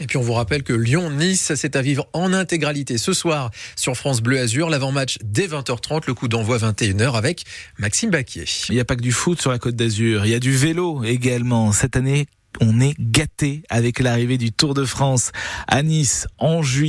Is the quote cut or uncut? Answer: uncut